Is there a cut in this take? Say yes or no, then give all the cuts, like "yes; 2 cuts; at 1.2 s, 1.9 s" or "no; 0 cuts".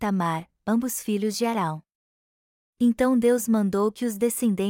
no; 0 cuts